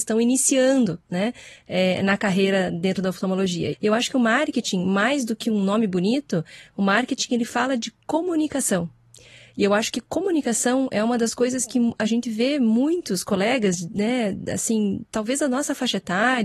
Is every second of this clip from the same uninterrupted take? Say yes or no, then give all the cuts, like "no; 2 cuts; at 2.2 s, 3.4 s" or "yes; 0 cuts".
no; 1 cut; at 3.7 s